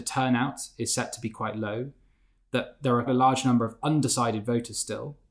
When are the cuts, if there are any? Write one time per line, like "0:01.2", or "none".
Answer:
0:03.1